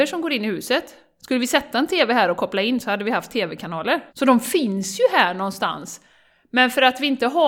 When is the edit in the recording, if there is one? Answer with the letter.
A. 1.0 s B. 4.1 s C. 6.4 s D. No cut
B